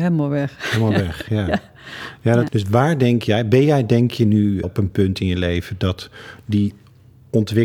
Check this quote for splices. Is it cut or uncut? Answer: cut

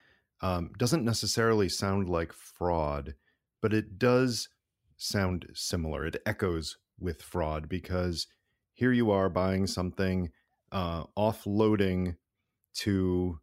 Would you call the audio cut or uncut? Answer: uncut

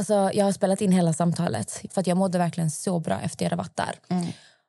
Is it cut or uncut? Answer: cut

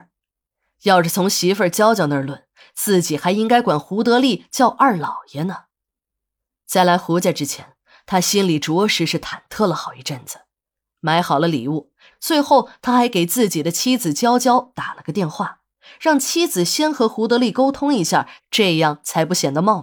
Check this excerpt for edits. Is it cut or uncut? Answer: cut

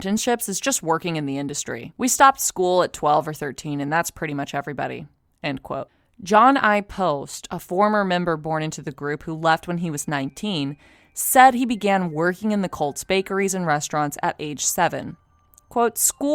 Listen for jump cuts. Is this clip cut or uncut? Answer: uncut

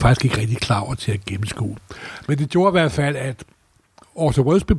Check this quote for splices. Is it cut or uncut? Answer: uncut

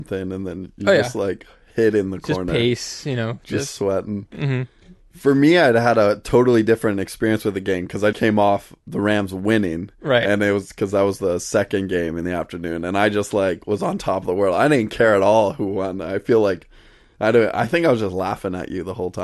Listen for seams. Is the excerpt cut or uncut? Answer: cut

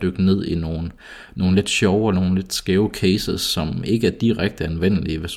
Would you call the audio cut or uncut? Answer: uncut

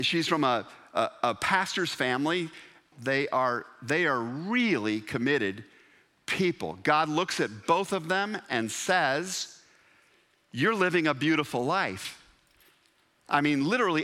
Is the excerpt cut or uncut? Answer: cut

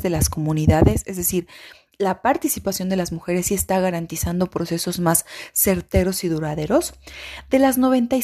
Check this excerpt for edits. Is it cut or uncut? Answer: uncut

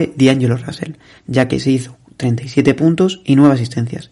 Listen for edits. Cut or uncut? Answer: uncut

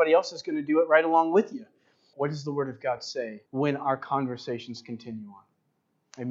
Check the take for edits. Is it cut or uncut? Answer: cut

